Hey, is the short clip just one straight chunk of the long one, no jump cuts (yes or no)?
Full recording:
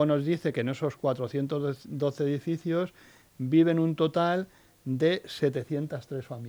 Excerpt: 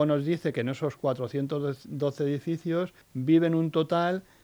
no